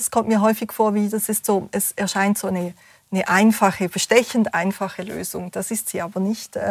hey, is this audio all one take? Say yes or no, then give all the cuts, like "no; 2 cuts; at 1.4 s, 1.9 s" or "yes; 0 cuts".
yes; 0 cuts